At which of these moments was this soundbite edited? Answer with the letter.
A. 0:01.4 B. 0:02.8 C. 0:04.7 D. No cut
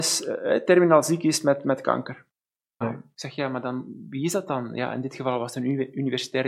B